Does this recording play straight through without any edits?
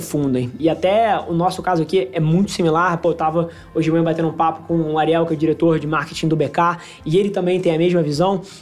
yes; 0 cuts

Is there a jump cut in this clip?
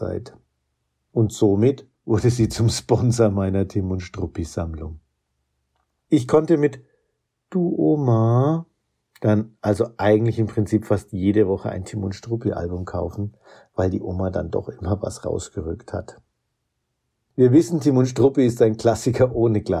no; 0 cuts

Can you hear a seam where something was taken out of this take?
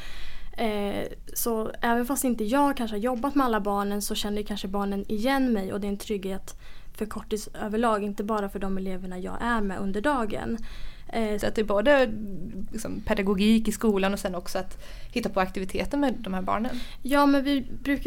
yes; 1 cut; at 11.4 s

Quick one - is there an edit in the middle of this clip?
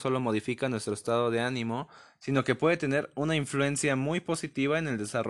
no; 0 cuts

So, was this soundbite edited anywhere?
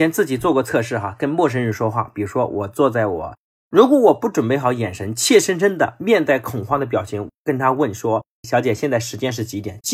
yes; 1 cut; at 3.6 s

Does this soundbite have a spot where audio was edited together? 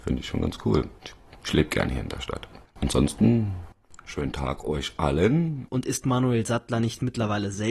yes; 2 cuts; at 1.0 s, 5.7 s

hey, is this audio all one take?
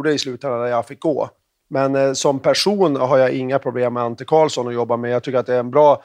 yes; 0 cuts

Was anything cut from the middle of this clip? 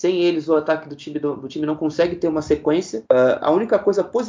yes; 1 cut; at 3.0 s

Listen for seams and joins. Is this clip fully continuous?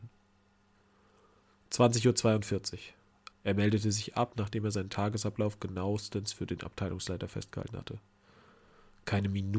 no; 1 cut; at 3.3 s

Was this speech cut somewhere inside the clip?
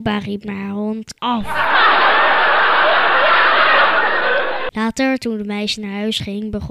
yes; 2 cuts; at 1.2 s, 4.7 s

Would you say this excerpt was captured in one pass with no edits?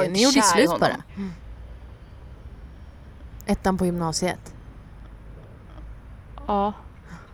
no; 1 cut; at 1.1 s

